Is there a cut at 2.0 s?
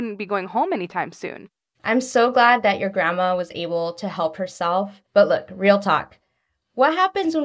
no; 0 cuts

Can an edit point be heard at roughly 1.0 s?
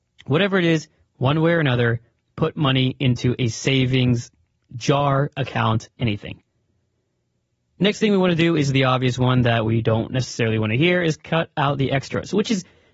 yes; 1 cut; at 1.0 s

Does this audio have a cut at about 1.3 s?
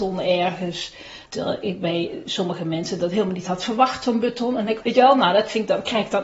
yes; 2 cuts; at 1.3 s, 4.8 s

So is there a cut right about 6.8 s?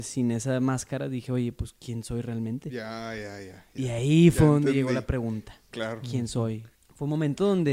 yes; 1 cut; at 6.8 s

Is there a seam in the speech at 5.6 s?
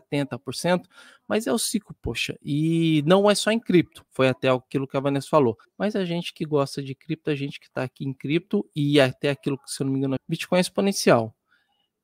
yes; 2 cuts; at 5.6 s, 10.2 s

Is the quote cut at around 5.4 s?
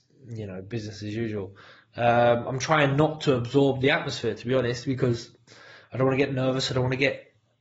no; 0 cuts

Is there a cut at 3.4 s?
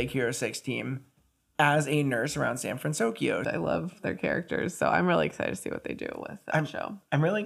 yes; 1 cut; at 3.4 s

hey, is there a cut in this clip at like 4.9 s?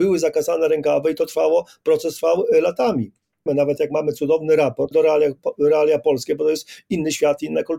yes; 2 cuts; at 3.5 s, 4.9 s

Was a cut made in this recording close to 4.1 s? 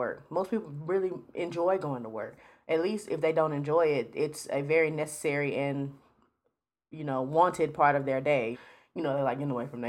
no; 1 cut; at 8.5 s

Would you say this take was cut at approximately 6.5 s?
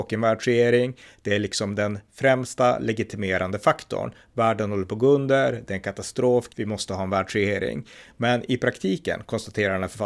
yes; 1 cut; at 6.5 s

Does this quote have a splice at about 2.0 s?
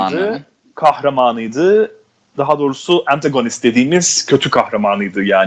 no; 0 cuts

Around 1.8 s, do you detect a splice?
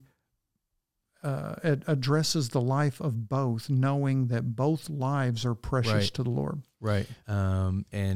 no; 1 cut; at 7.2 s

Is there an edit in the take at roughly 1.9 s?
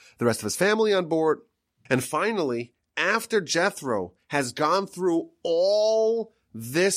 yes; 1 cut; at 1.9 s

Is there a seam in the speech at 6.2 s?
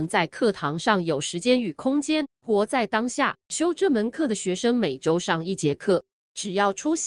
no; 2 cuts; at 2.2 s, 3.4 s

